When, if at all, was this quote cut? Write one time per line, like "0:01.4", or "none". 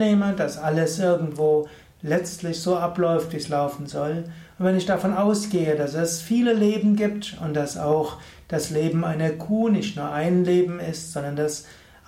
none